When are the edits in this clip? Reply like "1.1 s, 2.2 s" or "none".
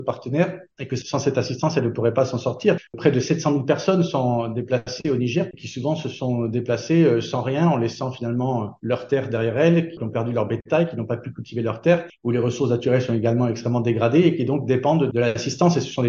5.5 s, 12.2 s